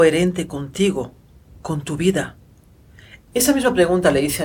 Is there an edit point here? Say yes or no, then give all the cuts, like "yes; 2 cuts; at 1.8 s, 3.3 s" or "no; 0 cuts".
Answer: yes; 1 cut; at 3.3 s